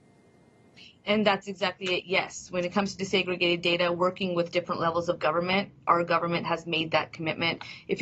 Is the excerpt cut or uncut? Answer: uncut